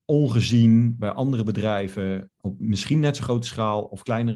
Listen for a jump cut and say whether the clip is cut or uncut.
cut